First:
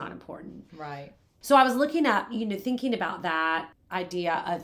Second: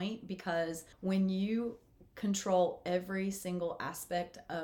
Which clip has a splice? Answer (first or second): second